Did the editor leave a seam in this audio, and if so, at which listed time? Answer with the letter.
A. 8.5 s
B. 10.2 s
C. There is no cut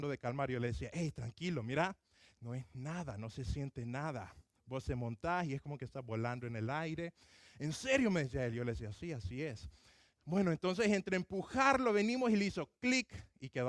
C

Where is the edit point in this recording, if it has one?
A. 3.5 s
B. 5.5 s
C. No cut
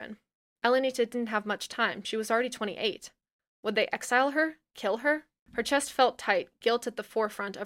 B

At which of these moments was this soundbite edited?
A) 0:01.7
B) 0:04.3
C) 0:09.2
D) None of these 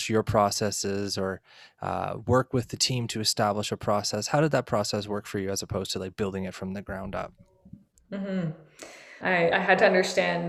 C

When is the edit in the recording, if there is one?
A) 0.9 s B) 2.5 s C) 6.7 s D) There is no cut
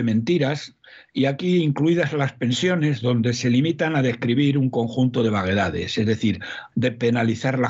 C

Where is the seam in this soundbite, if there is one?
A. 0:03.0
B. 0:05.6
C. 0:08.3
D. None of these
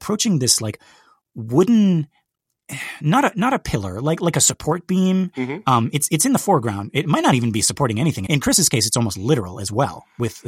C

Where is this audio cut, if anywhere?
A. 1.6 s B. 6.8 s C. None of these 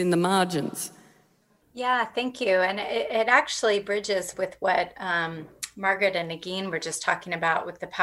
A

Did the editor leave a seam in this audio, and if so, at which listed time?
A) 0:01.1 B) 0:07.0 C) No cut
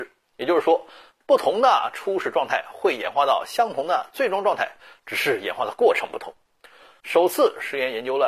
B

